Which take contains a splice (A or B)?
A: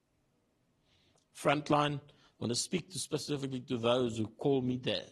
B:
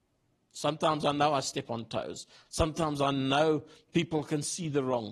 B